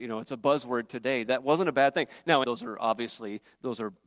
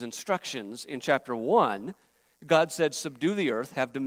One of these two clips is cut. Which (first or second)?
first